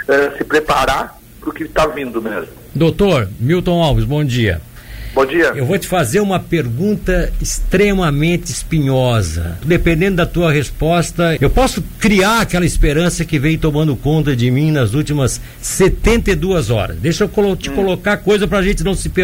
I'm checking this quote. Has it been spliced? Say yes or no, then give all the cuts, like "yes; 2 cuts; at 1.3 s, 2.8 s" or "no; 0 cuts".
yes; 2 cuts; at 9.6 s, 11.4 s